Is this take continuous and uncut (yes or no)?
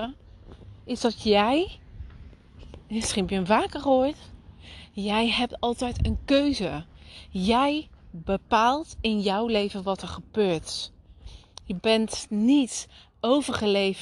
yes